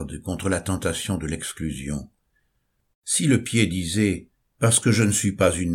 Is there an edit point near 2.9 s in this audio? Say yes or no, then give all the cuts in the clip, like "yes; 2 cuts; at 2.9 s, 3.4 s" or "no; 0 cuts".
yes; 1 cut; at 2.9 s